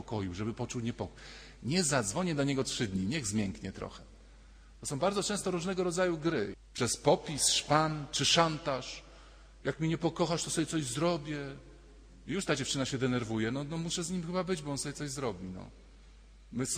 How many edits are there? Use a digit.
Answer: 1